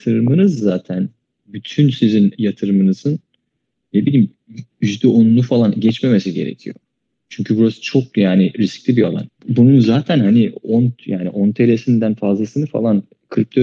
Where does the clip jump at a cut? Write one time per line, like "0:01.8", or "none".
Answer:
0:09.3